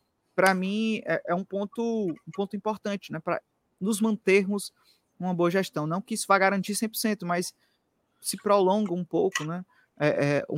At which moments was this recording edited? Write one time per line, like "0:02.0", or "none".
none

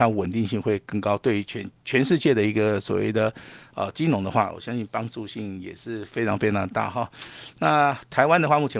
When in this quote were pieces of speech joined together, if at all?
none

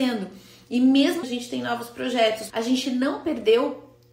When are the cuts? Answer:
0:01.2
0:02.5

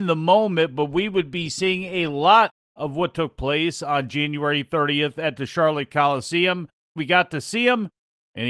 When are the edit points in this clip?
0:07.0

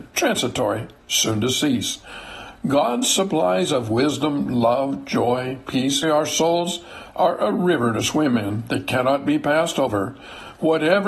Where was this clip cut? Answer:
0:06.0

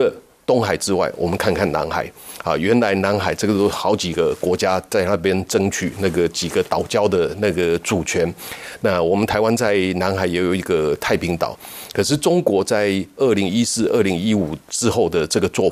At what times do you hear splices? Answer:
none

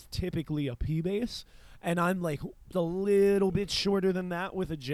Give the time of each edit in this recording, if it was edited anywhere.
0:02.7

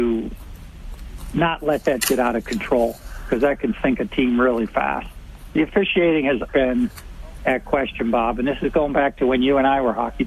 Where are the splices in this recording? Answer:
0:06.5

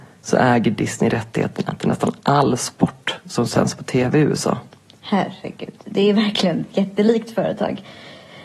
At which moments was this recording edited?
none

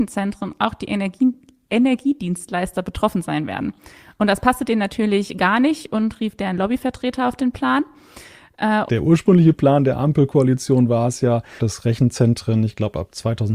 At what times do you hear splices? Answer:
0:08.9
0:11.6

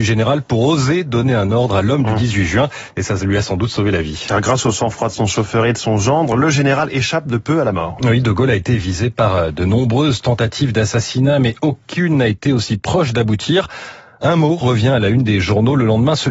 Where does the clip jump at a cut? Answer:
none

